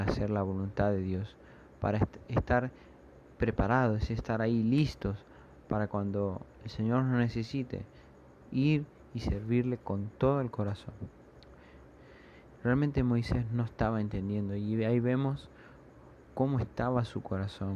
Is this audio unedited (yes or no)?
no